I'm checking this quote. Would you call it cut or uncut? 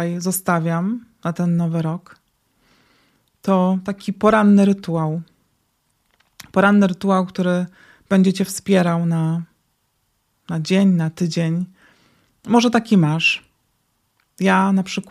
uncut